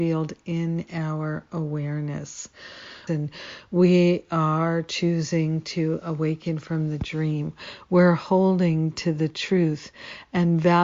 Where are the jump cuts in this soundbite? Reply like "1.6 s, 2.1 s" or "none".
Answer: 3.1 s